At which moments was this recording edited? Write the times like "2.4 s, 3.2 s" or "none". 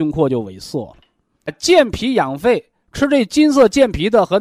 1.5 s, 2.8 s